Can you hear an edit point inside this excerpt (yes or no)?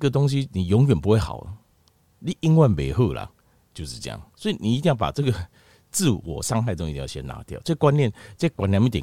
no